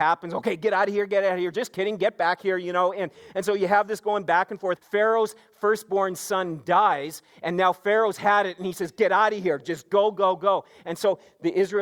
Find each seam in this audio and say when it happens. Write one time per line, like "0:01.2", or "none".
0:04.8

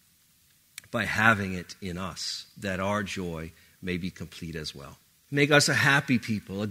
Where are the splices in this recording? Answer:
0:05.3

